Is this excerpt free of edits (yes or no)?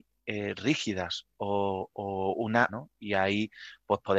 no